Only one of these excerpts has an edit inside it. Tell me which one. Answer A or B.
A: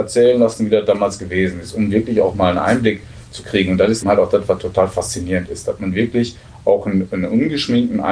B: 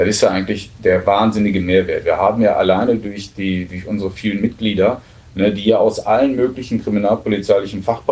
A